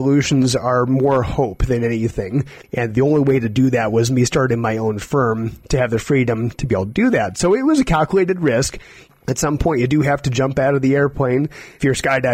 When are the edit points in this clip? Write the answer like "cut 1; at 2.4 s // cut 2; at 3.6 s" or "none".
cut 1; at 2.6 s